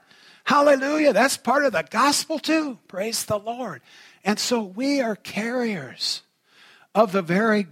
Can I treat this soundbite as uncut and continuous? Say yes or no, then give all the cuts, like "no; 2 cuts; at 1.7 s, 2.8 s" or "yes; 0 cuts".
yes; 0 cuts